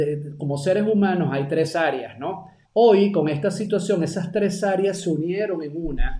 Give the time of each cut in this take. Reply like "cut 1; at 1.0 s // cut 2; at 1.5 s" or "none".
cut 1; at 2.7 s